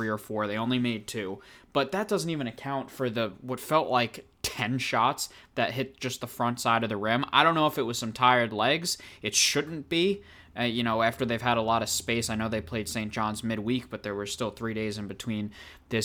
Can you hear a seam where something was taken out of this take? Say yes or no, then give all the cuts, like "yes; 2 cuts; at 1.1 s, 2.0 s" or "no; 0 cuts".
no; 0 cuts